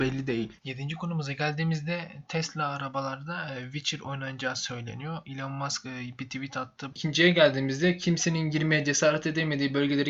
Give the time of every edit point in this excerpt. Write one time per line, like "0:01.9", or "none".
0:06.9